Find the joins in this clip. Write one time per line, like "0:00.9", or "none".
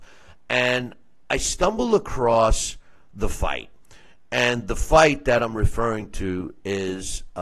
none